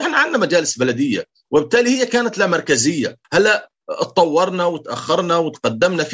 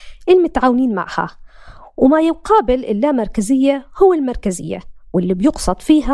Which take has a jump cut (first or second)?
first